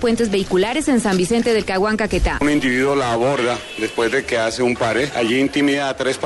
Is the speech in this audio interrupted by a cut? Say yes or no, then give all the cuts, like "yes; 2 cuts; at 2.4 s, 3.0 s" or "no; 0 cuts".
yes; 1 cut; at 2.4 s